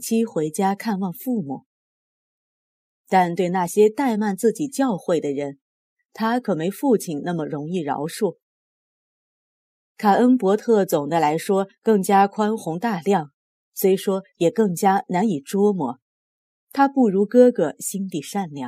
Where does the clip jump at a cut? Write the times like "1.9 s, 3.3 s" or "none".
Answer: 2.9 s